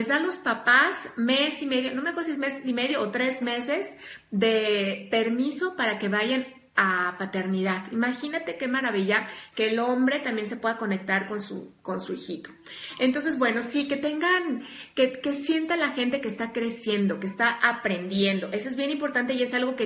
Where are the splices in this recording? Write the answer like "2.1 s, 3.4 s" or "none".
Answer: none